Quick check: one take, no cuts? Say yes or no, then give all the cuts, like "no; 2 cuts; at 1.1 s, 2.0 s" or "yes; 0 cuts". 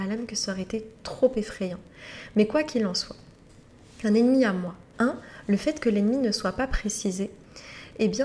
no; 1 cut; at 4.9 s